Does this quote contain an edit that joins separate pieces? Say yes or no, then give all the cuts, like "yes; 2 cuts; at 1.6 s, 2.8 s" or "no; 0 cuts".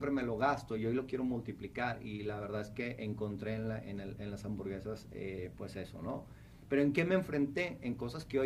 no; 0 cuts